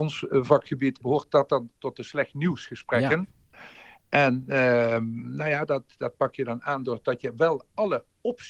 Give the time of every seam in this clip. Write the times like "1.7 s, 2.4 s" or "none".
1.0 s

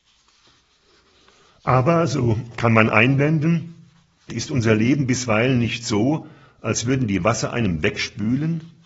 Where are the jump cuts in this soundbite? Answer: 4.3 s

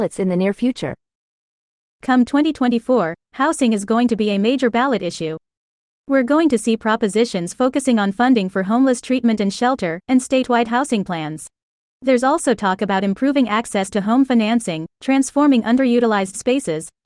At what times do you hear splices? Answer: 10.1 s, 11.9 s, 14.9 s

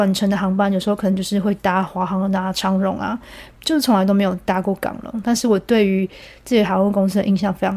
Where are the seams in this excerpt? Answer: none

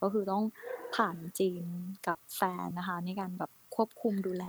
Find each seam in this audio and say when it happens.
2.7 s

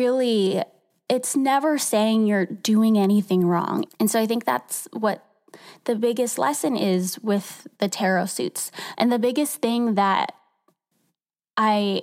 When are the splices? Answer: 3.9 s, 8.9 s

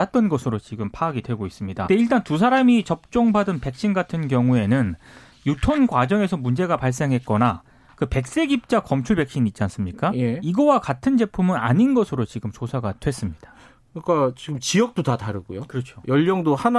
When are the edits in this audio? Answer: 1.9 s

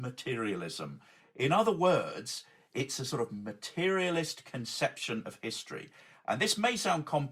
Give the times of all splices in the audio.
none

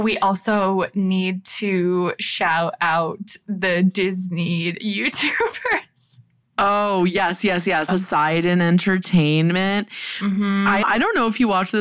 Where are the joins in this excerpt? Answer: 7.9 s, 10.8 s

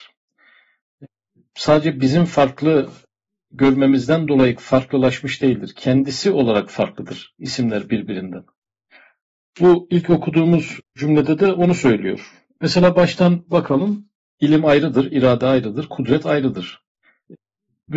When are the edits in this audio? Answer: 12.5 s, 14.3 s

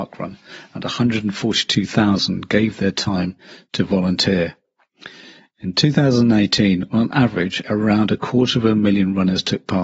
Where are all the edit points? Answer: 7.6 s

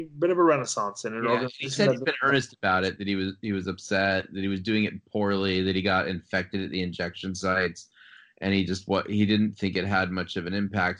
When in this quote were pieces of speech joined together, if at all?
3.0 s

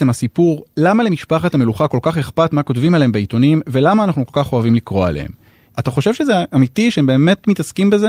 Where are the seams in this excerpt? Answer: 5.7 s

